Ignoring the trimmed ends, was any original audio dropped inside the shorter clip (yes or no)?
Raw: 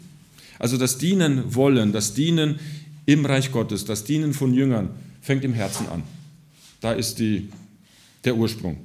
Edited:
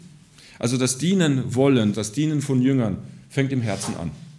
yes